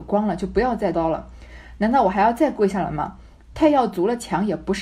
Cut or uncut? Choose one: cut